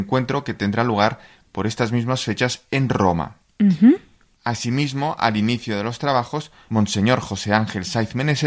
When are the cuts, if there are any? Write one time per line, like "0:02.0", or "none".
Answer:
0:04.4
0:06.7